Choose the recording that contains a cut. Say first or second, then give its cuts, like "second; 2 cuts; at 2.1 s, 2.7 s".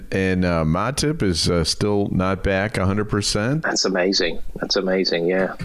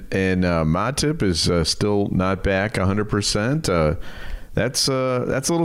first; 1 cut; at 3.6 s